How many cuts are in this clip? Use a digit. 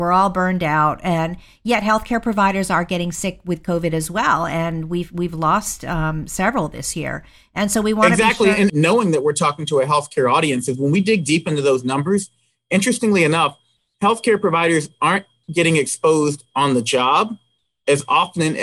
1